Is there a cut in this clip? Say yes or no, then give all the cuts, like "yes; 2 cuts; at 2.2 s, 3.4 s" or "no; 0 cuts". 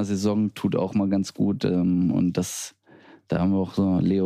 no; 0 cuts